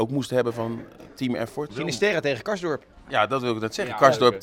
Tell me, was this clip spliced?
yes; 1 cut; at 1.7 s

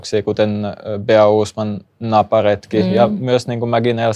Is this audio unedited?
yes; 0 cuts

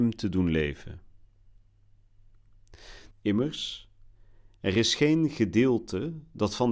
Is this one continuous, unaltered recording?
no; 1 cut; at 3.1 s

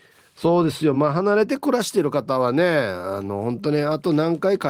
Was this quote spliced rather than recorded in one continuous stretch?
no; 0 cuts

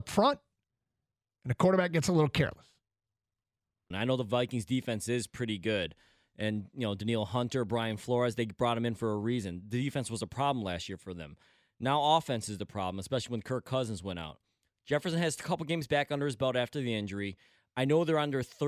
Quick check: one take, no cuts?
no; 1 cut; at 3.9 s

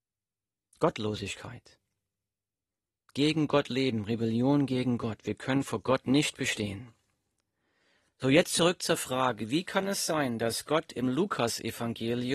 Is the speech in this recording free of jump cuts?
yes; 0 cuts

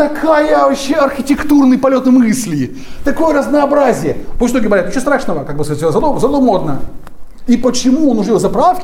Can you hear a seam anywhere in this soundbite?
yes; 2 cuts; at 4.4 s, 7.5 s

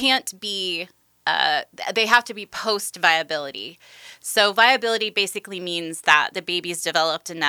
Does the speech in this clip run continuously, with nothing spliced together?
yes; 0 cuts

